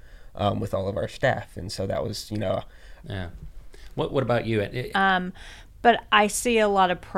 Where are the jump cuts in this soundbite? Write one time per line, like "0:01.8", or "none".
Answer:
0:03.0
0:04.9